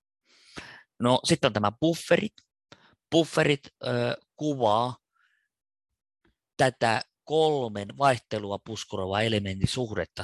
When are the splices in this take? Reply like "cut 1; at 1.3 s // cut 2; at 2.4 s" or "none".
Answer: none